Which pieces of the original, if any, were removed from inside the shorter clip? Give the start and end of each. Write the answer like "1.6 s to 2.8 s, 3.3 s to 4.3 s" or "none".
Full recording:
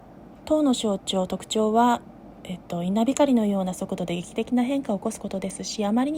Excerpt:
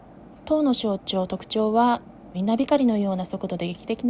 2.3 s to 2.8 s